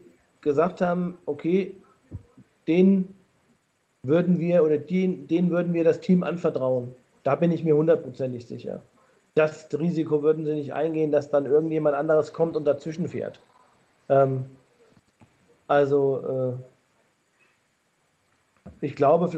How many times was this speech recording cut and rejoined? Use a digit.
1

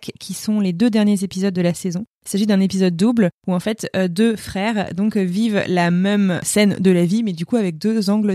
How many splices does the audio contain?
0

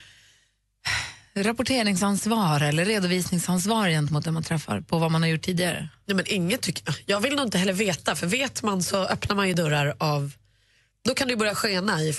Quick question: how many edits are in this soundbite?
0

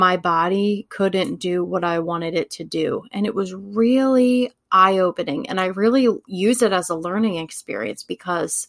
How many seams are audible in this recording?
0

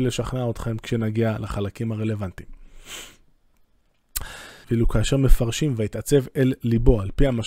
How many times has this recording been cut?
1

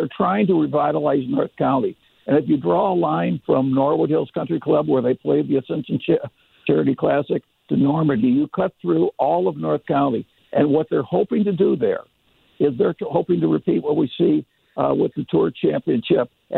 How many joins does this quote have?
0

